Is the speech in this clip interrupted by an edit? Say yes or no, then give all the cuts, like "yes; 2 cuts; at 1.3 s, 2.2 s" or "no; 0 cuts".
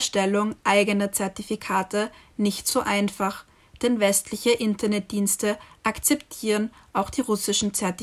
no; 0 cuts